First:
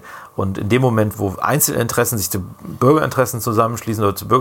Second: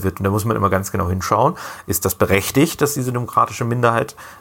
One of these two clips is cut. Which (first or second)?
first